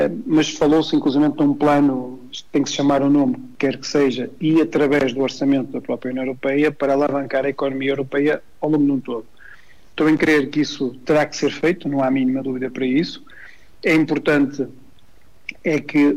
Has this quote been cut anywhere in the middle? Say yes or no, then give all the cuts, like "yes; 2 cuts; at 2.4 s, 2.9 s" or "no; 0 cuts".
no; 0 cuts